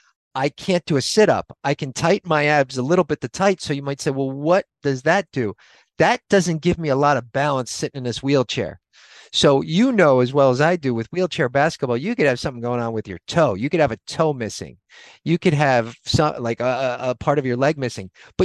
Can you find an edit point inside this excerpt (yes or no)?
no